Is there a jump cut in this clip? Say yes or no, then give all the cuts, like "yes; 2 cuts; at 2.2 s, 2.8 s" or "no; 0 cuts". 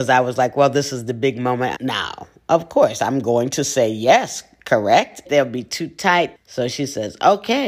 yes; 3 cuts; at 1.7 s, 5.2 s, 6.3 s